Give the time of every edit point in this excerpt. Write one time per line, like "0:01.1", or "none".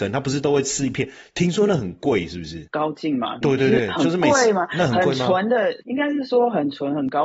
0:03.4